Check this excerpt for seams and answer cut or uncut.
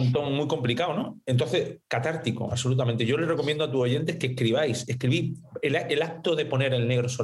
cut